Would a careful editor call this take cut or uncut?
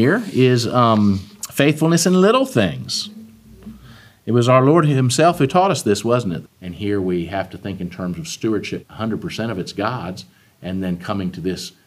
cut